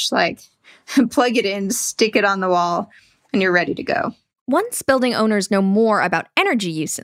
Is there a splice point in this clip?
no; 0 cuts

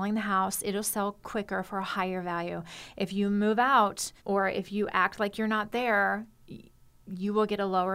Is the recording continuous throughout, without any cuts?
no; 1 cut; at 4.2 s

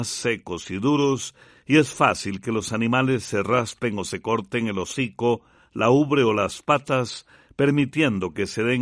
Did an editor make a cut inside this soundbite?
no; 0 cuts

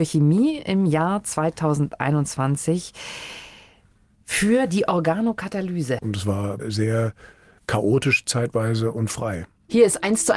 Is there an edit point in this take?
yes; 1 cut; at 6.0 s

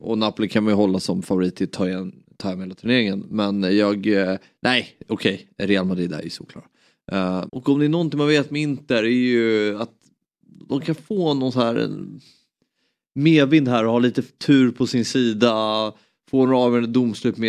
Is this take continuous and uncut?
no; 1 cut; at 7.5 s

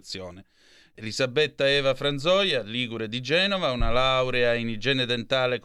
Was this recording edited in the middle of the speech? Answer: yes; 1 cut; at 1.0 s

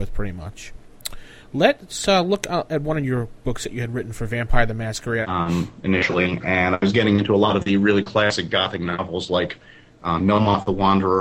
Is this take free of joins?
no; 1 cut; at 5.2 s

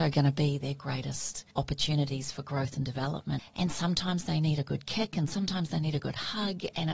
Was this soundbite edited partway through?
yes; 2 cuts; at 1.5 s, 3.4 s

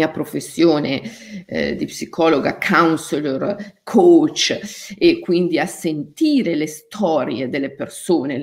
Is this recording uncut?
yes; 0 cuts

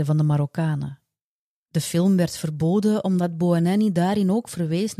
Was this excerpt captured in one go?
no; 1 cut; at 1.5 s

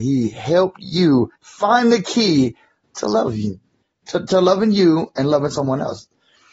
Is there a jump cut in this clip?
yes; 1 cut; at 1.3 s

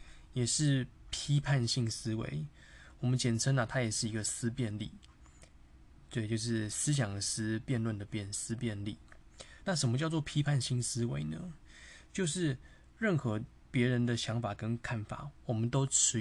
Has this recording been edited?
no; 0 cuts

